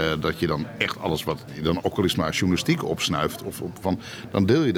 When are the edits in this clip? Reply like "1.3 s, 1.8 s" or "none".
1.8 s, 3.8 s